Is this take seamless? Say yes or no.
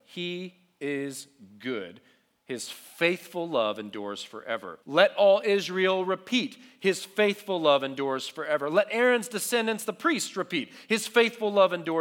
no